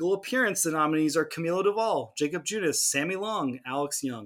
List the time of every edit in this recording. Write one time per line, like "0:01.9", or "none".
none